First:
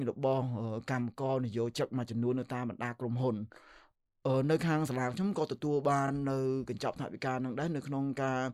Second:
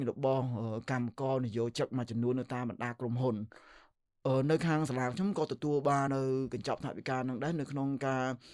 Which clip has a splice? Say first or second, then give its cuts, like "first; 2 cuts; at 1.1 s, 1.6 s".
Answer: second; 1 cut; at 6.1 s